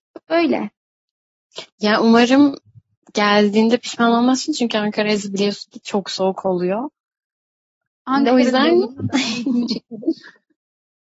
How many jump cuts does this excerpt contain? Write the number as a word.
zero